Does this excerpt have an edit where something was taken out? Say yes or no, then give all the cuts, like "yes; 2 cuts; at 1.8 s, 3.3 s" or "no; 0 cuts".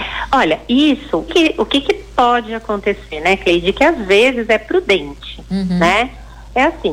yes; 1 cut; at 1.3 s